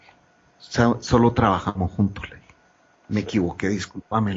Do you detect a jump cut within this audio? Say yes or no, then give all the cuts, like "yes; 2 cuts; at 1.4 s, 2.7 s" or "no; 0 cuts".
no; 0 cuts